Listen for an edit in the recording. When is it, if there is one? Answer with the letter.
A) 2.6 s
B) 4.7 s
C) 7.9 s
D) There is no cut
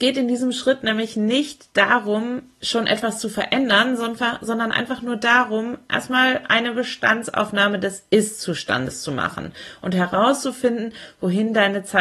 D